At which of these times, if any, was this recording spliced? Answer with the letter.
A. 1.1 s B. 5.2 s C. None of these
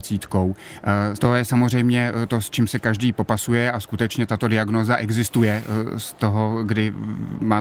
A